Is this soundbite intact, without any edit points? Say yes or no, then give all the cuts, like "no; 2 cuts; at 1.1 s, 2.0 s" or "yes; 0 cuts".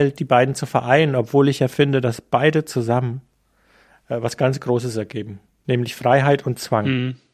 yes; 0 cuts